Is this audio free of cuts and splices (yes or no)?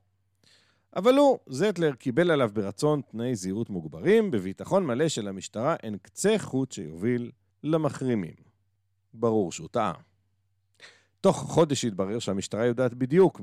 yes